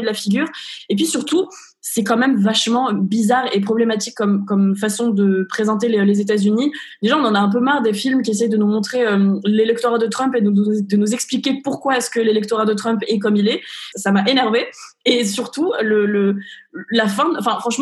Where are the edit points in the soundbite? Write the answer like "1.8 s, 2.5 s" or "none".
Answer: 13.9 s